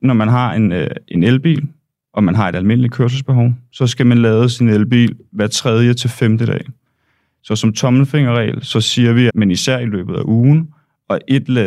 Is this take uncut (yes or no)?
no